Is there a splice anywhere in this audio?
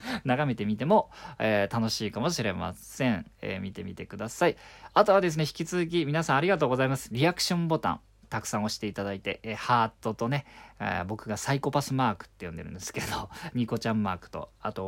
no; 0 cuts

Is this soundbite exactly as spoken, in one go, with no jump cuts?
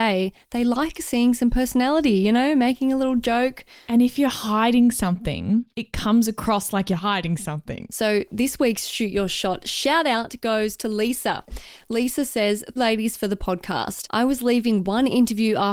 no; 3 cuts; at 5.7 s, 7.9 s, 12.8 s

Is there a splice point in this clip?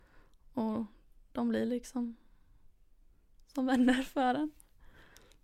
no; 0 cuts

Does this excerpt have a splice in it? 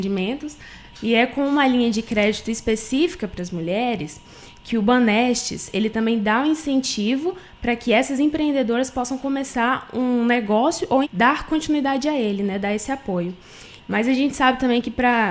yes; 3 cuts; at 0.9 s, 11.0 s, 13.8 s

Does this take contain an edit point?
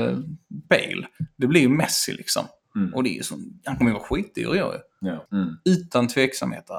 yes; 1 cut; at 5.3 s

